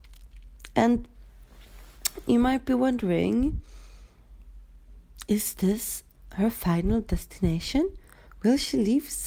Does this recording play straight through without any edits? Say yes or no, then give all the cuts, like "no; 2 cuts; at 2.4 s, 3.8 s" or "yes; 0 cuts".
yes; 0 cuts